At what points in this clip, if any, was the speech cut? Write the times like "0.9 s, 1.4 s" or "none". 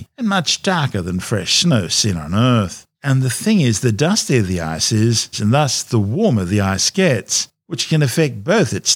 2.9 s, 5.3 s